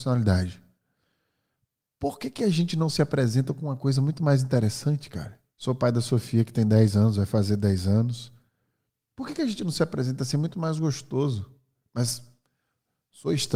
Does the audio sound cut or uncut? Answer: cut